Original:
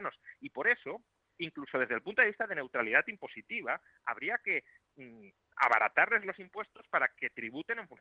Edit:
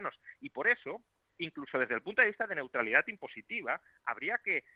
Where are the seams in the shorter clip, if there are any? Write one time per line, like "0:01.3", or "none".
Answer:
none